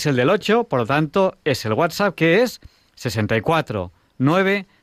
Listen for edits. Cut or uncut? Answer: uncut